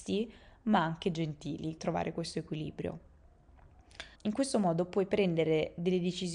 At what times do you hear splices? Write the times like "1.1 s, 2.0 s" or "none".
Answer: 1.8 s, 4.2 s